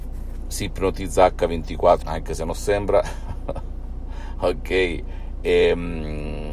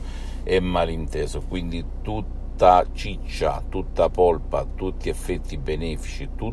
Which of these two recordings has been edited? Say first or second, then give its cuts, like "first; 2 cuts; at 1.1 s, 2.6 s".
first; 1 cut; at 2.0 s